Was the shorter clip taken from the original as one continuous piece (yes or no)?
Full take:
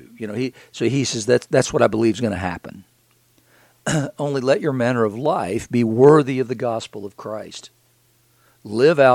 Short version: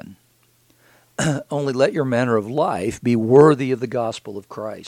yes